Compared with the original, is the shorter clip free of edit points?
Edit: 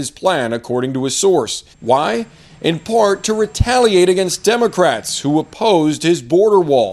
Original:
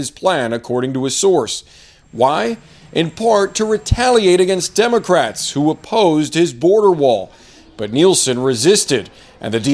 no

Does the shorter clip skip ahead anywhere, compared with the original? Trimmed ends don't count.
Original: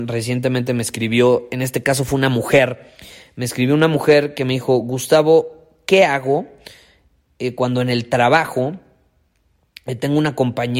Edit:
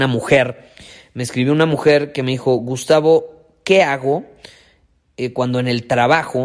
no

